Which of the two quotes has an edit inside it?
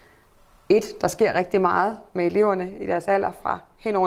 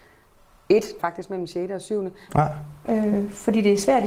second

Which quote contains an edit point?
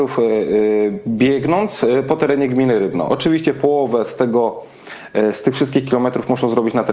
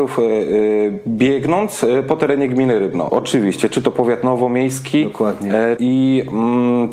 second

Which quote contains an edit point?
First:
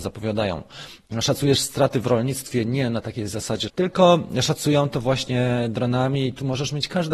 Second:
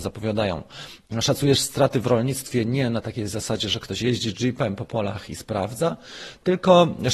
first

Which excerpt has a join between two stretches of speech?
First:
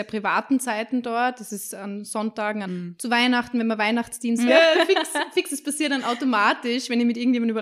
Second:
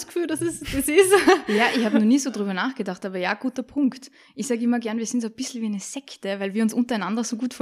first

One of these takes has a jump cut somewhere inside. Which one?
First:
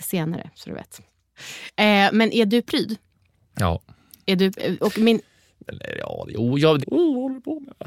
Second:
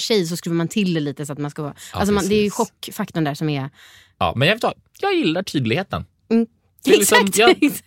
first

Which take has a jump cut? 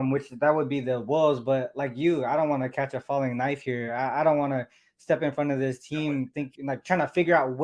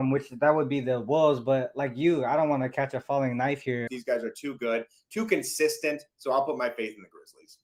second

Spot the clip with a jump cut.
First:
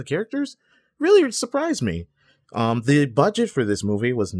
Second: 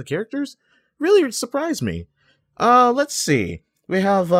first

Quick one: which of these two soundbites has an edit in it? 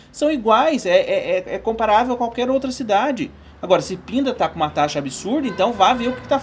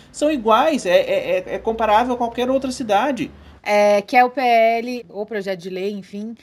second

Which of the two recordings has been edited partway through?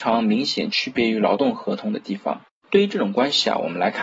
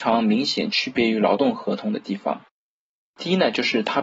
first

